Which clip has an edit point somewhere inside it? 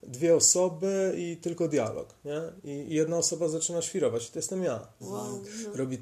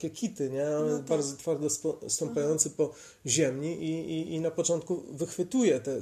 first; 1 cut; at 5.0 s

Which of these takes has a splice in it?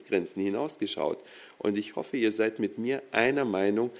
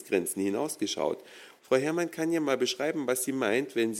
second; 1 cut; at 1.6 s

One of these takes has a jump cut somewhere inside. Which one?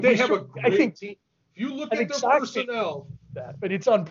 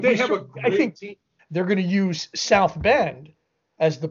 second; 1 cut; at 1.4 s

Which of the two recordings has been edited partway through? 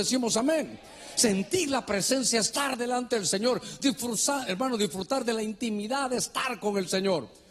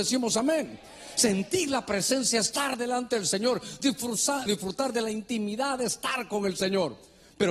second; 1 cut; at 4.5 s

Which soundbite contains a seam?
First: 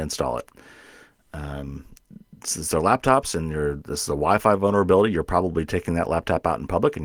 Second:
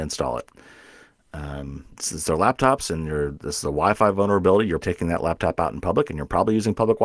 second; 2 cuts; at 1.9 s, 4.8 s

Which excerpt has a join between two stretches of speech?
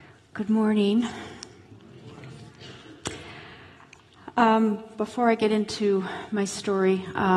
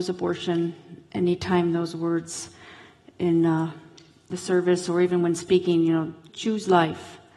second; 1 cut; at 6.3 s

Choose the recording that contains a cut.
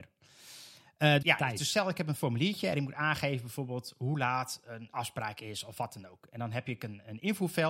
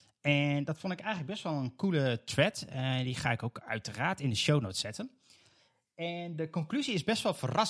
first; 1 cut; at 1.2 s

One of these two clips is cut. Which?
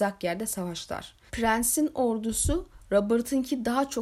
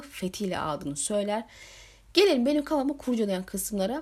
first; 1 cut; at 1.3 s

